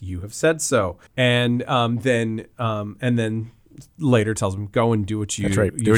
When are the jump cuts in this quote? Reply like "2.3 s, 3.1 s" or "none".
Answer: 1.1 s